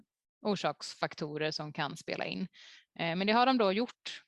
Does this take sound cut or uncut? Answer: uncut